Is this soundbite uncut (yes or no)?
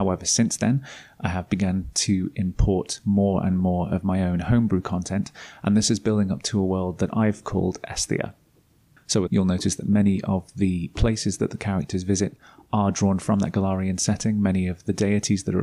no